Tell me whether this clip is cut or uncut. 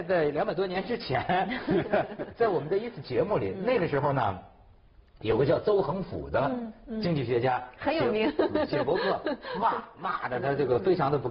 uncut